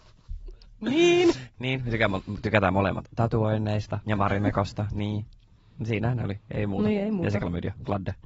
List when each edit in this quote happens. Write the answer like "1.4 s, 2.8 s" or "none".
4.0 s